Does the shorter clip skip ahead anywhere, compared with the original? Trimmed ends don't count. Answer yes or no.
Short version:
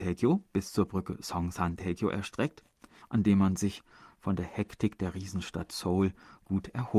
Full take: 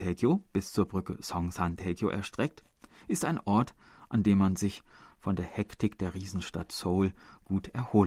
yes